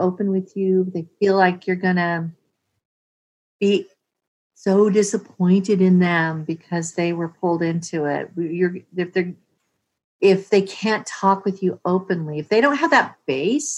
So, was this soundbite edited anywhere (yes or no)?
no